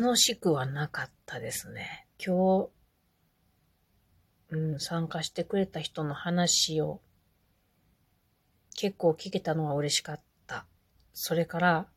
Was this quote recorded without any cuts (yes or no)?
no